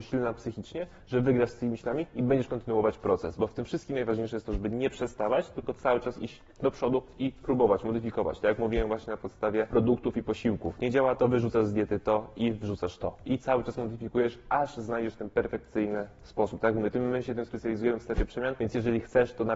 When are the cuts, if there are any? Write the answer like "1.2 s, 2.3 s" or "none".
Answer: 11.2 s